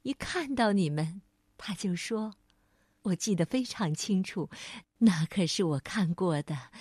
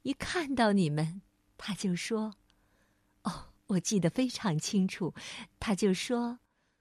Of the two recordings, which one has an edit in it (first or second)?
first